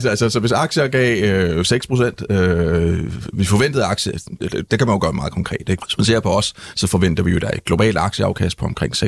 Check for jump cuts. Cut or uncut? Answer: cut